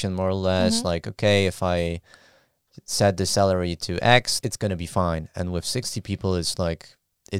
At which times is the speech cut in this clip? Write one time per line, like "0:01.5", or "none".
0:04.4